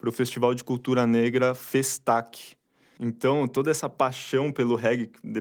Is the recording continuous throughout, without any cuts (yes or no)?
no